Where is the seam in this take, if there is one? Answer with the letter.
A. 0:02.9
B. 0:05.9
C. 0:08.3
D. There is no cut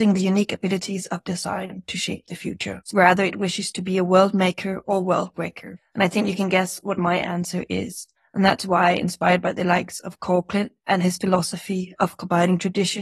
A